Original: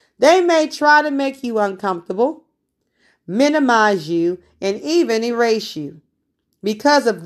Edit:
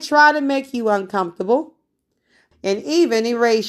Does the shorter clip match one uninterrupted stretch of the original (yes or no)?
no